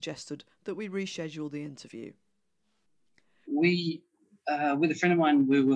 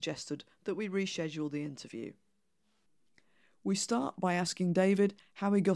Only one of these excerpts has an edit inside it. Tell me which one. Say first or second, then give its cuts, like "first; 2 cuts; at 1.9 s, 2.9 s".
first; 1 cut; at 3.4 s